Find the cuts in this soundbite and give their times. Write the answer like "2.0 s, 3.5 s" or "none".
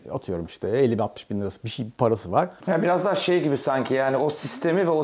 2.6 s